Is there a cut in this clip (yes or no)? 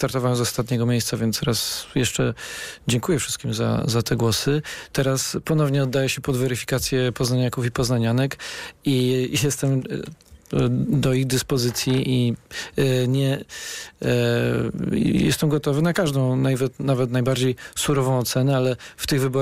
no